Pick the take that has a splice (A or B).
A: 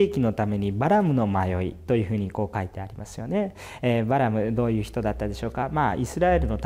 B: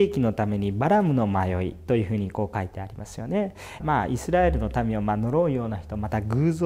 B